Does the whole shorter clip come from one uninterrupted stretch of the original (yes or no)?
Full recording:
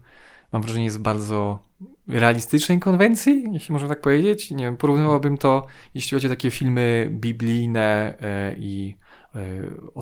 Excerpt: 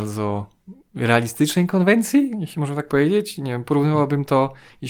yes